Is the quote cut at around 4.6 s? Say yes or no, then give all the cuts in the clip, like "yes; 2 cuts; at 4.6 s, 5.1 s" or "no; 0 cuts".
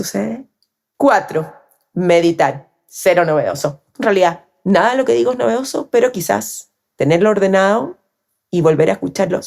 no; 1 cut; at 0.9 s